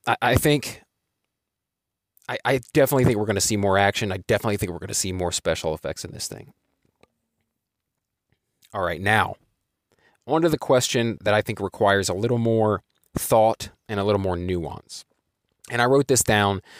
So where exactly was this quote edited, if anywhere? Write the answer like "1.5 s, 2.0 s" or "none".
11.2 s